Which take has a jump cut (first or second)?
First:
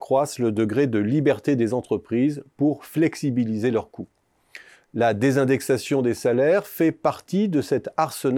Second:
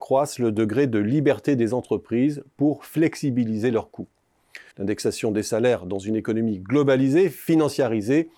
second